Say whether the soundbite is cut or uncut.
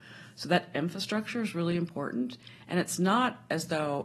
uncut